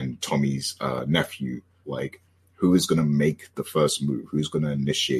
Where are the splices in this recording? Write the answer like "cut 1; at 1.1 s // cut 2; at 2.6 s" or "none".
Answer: cut 1; at 1.8 s